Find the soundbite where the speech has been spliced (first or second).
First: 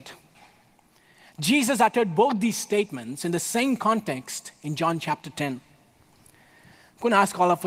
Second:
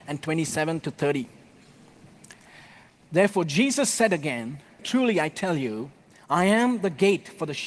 second